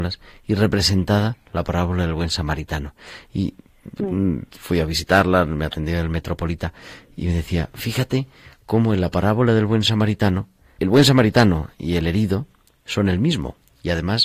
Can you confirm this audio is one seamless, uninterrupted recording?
no; 1 cut; at 10.8 s

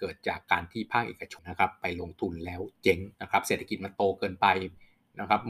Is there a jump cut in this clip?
yes; 2 cuts; at 1.4 s, 3.1 s

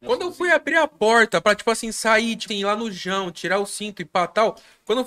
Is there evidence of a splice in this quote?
yes; 1 cut; at 2.5 s

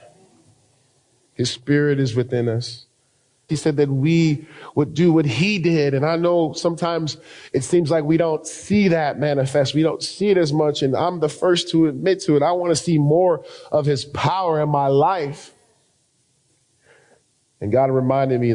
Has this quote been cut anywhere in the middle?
yes; 1 cut; at 3.5 s

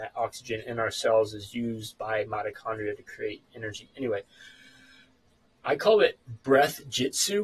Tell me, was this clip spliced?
no; 0 cuts

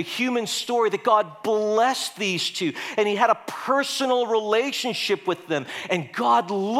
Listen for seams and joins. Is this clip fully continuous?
yes; 0 cuts

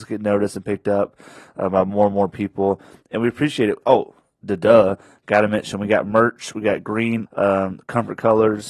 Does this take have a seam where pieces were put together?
yes; 1 cut; at 7.3 s

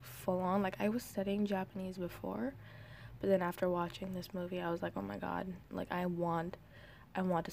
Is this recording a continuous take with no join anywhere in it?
yes; 0 cuts

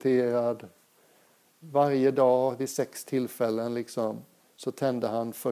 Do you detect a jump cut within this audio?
no; 0 cuts

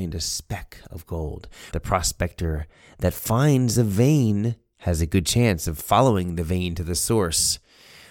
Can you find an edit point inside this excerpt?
yes; 1 cut; at 1.7 s

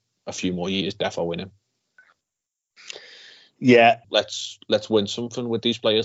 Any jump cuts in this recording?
yes; 1 cut; at 4.0 s

